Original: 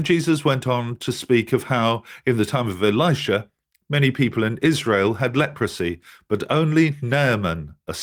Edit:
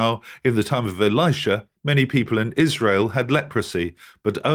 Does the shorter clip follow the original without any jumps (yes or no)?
no